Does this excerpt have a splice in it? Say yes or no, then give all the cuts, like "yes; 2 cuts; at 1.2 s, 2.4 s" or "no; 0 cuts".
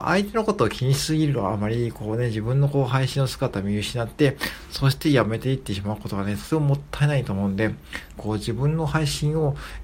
yes; 1 cut; at 8.2 s